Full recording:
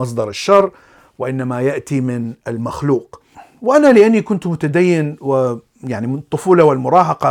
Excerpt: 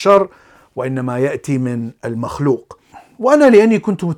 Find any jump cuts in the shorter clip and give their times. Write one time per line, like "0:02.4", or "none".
none